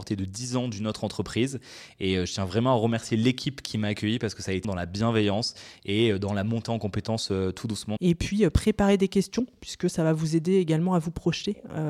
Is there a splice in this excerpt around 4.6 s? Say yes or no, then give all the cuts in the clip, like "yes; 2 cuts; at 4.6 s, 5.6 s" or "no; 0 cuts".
yes; 2 cuts; at 4.6 s, 8.0 s